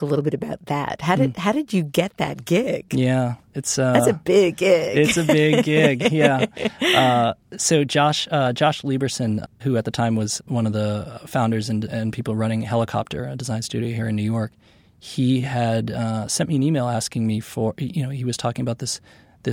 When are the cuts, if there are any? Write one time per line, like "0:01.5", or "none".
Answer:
none